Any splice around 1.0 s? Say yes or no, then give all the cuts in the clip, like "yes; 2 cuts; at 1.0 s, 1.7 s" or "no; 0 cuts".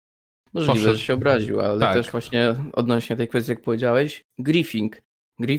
no; 0 cuts